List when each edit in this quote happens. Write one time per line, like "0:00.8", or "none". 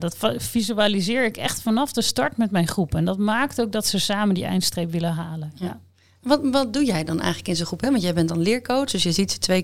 none